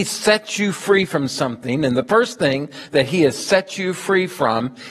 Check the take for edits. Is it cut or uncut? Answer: uncut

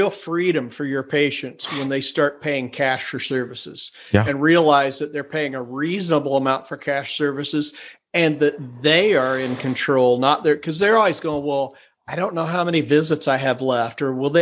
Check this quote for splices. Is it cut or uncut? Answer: uncut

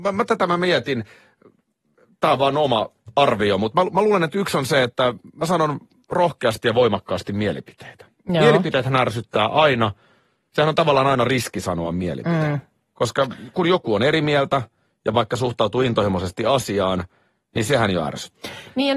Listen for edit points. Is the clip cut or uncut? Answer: uncut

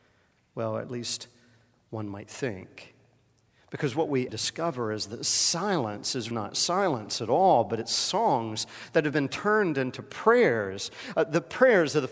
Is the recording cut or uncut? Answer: cut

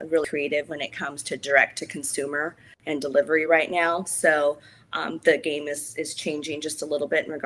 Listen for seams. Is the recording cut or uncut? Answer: uncut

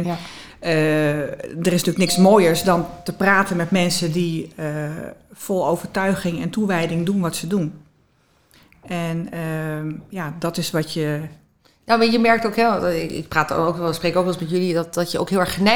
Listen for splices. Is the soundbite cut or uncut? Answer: uncut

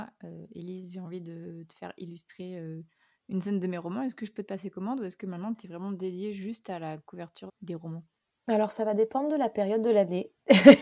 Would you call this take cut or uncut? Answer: cut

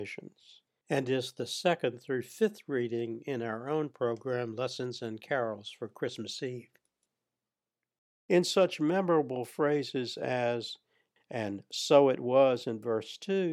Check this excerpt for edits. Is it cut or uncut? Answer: cut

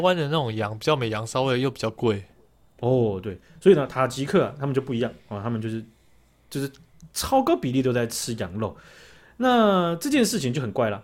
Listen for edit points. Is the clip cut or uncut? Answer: uncut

